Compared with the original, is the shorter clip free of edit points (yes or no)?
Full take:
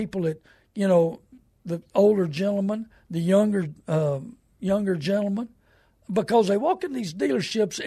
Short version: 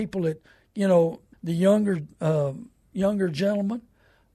no